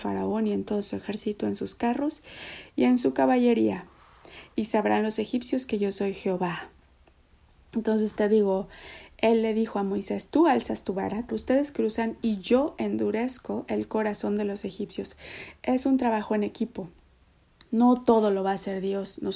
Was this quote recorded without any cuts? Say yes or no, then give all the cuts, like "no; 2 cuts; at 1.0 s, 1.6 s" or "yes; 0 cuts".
no; 1 cut; at 11.3 s